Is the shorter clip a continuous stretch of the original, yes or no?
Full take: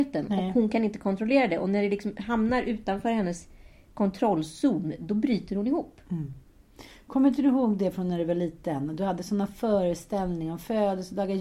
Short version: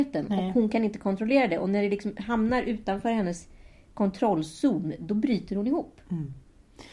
yes